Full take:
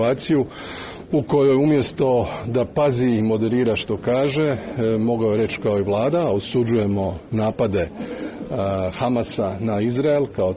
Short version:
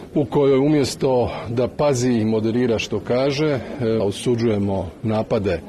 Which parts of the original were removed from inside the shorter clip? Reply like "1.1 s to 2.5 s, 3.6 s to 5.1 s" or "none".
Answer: 5.0 s to 6.3 s